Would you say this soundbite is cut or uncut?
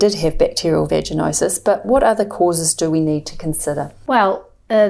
uncut